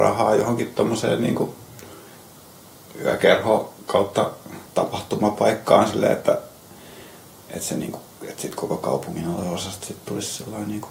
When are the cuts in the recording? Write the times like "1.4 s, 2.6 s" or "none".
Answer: 4.7 s